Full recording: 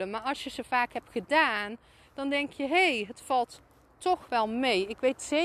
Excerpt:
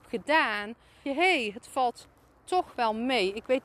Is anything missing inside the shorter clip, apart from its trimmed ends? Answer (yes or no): yes